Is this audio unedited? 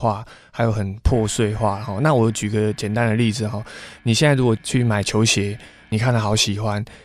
yes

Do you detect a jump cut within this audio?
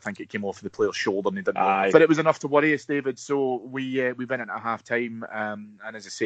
yes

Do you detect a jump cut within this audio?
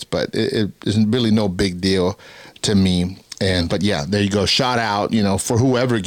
yes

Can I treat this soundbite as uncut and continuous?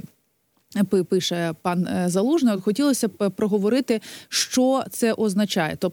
yes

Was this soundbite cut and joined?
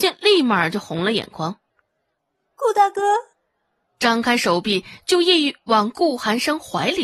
yes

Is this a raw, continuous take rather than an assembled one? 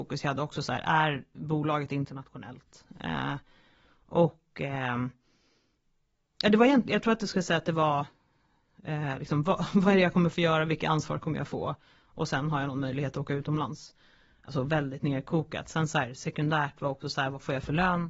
yes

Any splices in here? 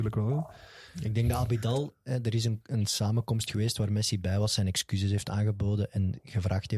no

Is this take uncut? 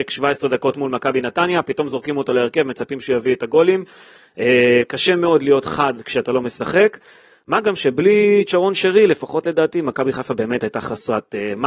yes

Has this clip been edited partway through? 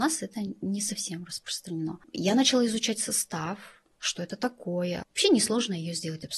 yes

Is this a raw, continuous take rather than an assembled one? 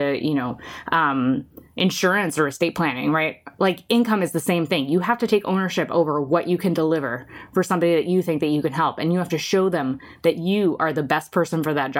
yes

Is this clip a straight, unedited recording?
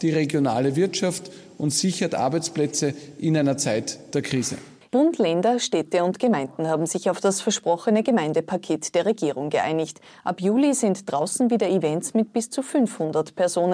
no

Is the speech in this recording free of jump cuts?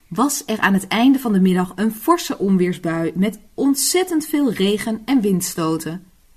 yes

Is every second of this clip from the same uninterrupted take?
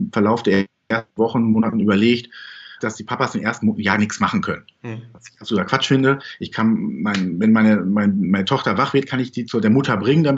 no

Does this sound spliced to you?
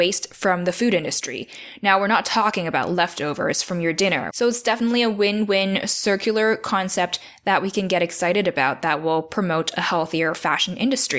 yes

